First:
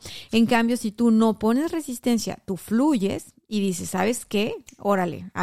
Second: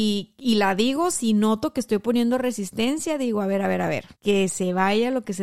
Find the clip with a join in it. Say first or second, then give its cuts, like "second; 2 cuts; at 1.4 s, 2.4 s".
second; 1 cut; at 4.1 s